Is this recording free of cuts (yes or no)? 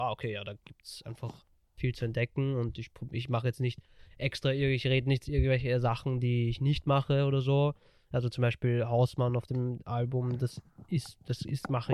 yes